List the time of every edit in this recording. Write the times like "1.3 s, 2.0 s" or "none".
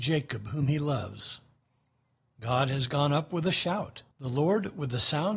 4.1 s

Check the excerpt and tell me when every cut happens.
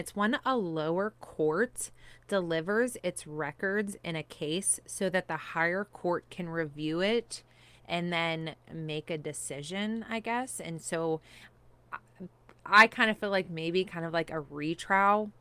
none

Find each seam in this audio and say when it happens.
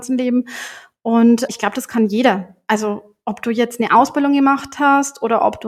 1.5 s

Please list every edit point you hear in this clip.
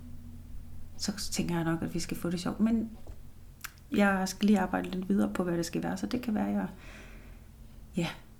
3.9 s

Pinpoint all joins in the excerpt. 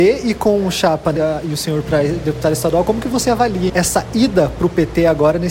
1.2 s, 3.7 s

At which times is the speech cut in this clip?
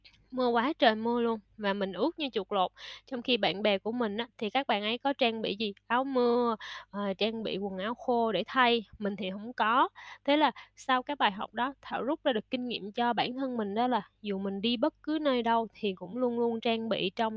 none

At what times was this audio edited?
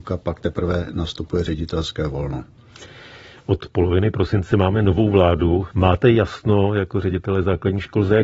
5.7 s

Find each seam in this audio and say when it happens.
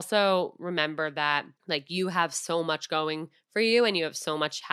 1.6 s

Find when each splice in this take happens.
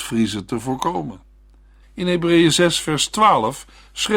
1.8 s

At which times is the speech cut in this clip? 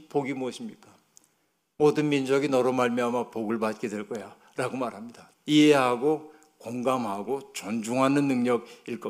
5.3 s

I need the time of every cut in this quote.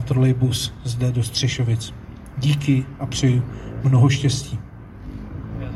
none

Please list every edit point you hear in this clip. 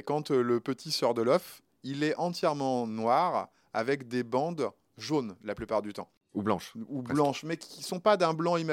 none

